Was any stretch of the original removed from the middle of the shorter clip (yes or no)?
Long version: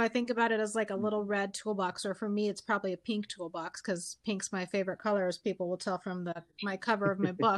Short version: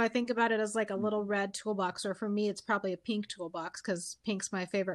no